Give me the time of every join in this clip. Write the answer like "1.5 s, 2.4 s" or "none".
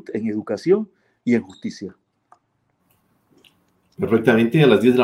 none